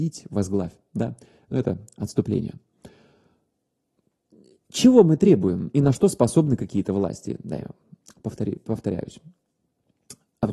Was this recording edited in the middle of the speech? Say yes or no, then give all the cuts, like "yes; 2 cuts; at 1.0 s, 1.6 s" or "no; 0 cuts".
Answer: no; 0 cuts